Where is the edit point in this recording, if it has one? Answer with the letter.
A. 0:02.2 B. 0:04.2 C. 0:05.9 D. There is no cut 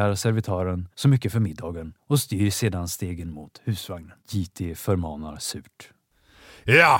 B